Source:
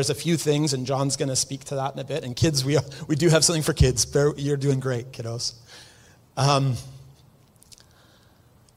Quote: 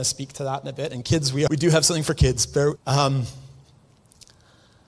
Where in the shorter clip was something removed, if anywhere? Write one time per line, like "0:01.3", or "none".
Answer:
0:01.5
0:02.8